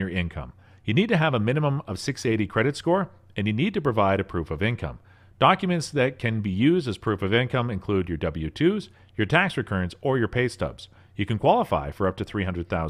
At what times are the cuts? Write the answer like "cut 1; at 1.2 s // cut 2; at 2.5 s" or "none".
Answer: none

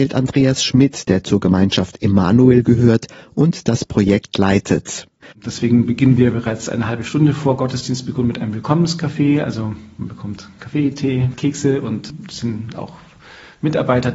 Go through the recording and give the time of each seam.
cut 1; at 5.3 s

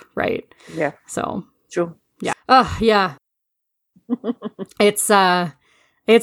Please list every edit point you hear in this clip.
cut 1; at 2.3 s

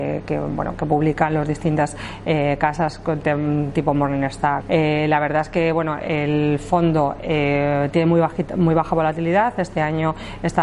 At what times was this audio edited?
cut 1; at 4.6 s

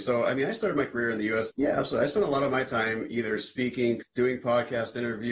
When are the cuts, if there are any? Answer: cut 1; at 1.5 s // cut 2; at 4.0 s

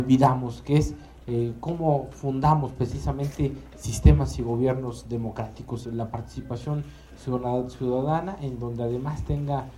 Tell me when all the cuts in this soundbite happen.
cut 1; at 5.8 s

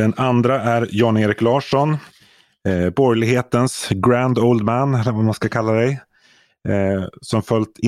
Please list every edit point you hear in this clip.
none

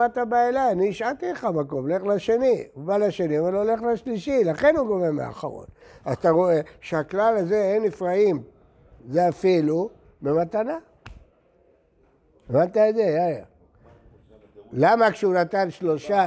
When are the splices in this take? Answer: cut 1; at 9.0 s

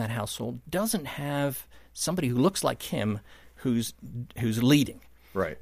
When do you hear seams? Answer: none

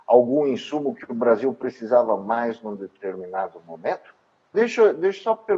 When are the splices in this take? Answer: cut 1; at 4.5 s

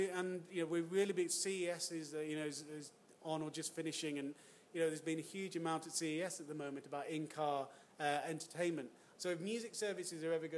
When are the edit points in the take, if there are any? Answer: cut 1; at 9.2 s

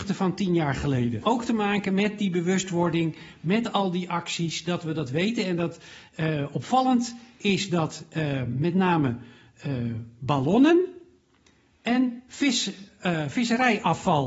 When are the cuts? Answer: cut 1; at 1.2 s

